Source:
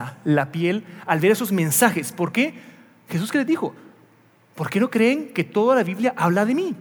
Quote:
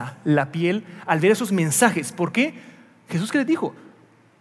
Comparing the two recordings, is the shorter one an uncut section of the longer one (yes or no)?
yes